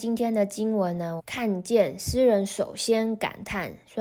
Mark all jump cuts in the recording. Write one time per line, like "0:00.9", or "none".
0:01.2